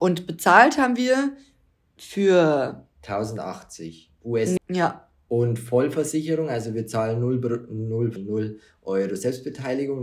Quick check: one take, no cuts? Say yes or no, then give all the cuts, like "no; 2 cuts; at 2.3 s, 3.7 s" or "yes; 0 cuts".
no; 2 cuts; at 4.6 s, 8.2 s